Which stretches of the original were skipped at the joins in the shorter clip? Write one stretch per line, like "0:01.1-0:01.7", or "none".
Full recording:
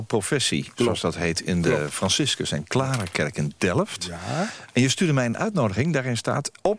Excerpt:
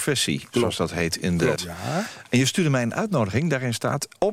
0:01.8-0:04.0